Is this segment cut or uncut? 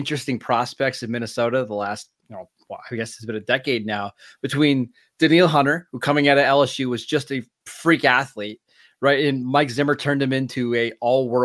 uncut